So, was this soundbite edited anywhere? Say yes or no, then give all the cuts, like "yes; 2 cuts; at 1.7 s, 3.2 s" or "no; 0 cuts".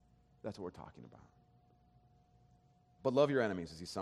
yes; 1 cut; at 3.0 s